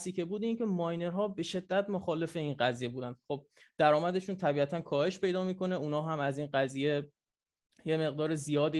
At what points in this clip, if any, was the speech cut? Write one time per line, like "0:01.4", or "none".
none